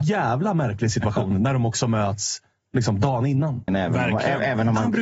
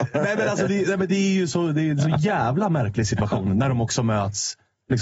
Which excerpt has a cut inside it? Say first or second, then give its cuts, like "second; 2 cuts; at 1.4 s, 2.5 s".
first; 1 cut; at 3.7 s